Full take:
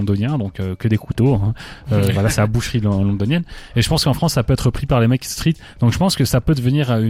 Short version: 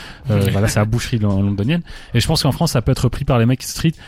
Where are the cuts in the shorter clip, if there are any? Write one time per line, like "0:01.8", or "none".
none